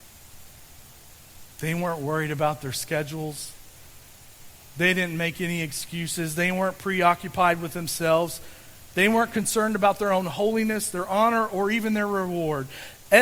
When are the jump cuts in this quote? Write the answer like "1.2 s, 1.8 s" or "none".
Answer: none